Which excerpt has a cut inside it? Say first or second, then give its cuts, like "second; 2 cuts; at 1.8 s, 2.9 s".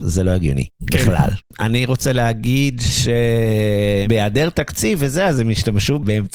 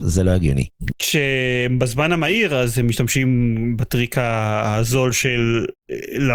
second; 1 cut; at 0.9 s